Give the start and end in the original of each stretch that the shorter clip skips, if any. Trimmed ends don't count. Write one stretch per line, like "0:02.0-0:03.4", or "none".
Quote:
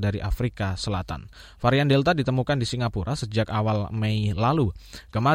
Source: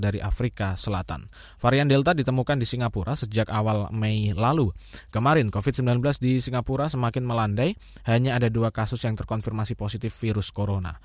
none